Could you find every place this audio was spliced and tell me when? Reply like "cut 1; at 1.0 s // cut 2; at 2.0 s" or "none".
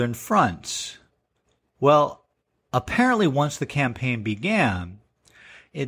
none